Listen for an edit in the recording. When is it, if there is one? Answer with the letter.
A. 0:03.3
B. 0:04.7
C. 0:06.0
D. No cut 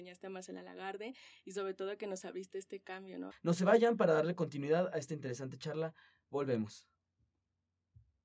A